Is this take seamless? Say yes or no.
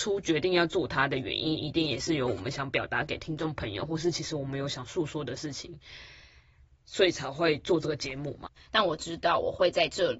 no